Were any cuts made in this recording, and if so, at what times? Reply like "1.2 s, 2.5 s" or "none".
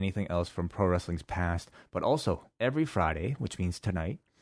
2.5 s